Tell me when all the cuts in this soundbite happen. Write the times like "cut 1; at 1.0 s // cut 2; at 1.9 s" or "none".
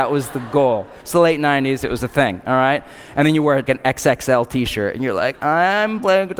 cut 1; at 3.7 s